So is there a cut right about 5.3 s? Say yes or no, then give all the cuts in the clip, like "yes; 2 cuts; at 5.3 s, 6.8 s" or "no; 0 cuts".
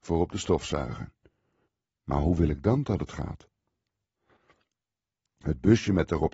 yes; 2 cuts; at 1.8 s, 5.3 s